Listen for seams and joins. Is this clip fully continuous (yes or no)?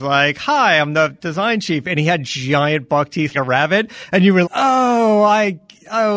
no